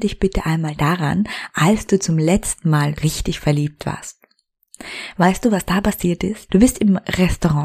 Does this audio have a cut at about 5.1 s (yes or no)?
no